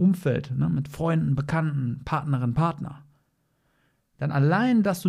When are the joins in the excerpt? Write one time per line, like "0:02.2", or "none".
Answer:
none